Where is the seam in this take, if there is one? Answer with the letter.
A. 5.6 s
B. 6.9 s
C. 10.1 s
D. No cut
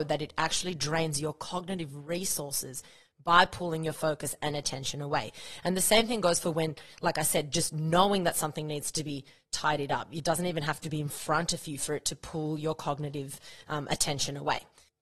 D